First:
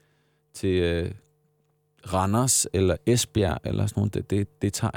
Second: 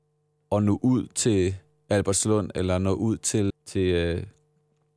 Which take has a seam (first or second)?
second